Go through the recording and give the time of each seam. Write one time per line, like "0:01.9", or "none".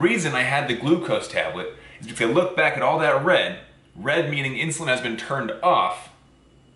none

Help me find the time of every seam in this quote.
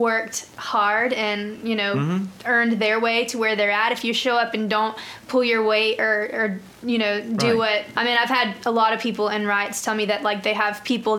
0:07.9

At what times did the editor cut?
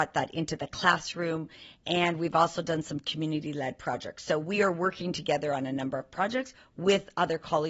none

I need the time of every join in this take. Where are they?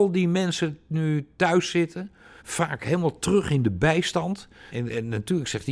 0:02.4
0:04.7

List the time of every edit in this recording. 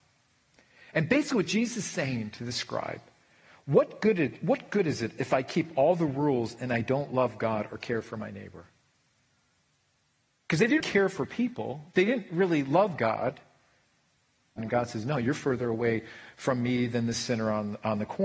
0:10.8
0:14.6

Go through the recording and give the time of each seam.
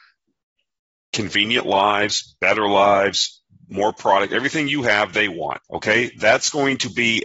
0:05.6

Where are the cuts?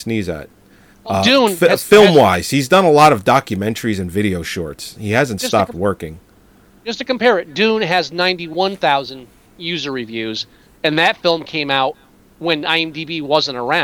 0:00.9

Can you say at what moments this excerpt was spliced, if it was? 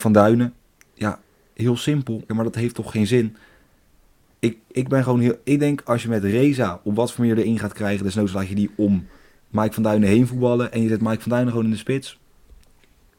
0:02.3

